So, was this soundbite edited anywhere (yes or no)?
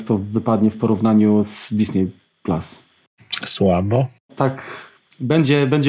no